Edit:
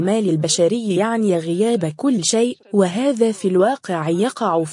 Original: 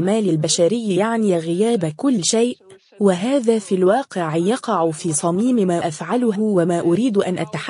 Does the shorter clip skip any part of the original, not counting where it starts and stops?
yes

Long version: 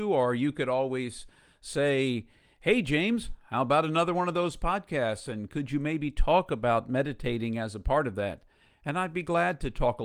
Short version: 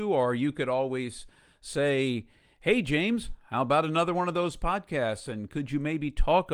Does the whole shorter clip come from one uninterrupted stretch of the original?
yes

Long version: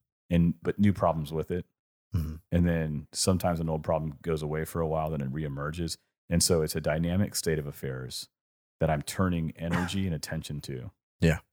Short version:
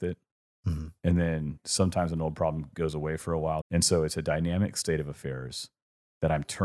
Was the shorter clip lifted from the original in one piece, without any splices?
no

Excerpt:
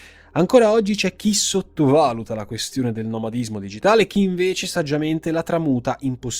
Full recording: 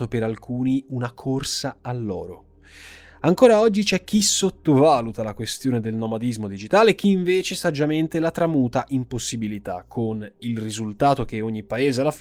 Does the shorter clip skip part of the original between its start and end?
no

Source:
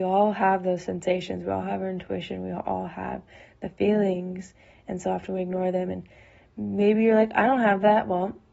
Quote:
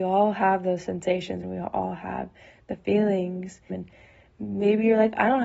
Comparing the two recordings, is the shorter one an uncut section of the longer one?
no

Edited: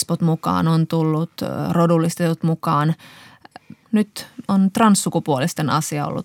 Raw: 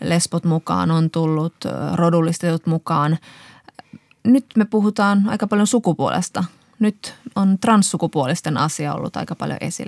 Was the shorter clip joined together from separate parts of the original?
yes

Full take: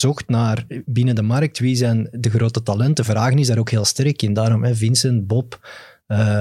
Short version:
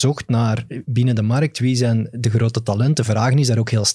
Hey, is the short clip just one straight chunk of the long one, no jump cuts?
yes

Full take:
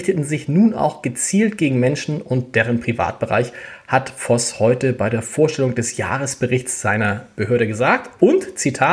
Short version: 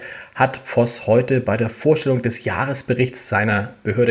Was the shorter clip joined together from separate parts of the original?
no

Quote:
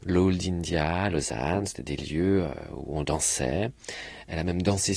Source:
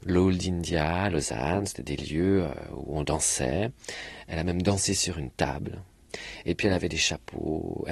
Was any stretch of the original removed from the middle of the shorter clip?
no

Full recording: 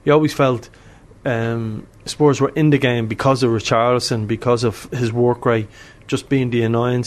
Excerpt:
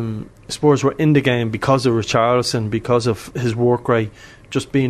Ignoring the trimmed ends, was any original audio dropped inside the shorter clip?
no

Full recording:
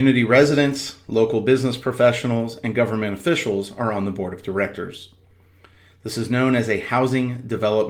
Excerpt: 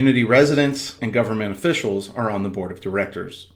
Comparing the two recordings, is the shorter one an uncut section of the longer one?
no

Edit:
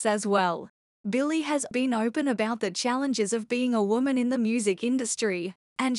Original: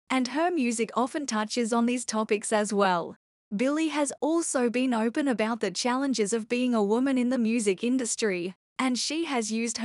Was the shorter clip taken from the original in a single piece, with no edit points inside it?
no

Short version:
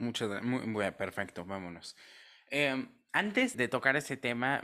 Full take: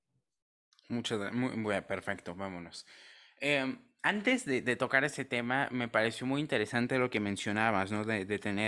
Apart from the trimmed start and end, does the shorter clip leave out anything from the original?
yes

